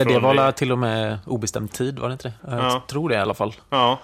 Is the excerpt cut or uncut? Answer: cut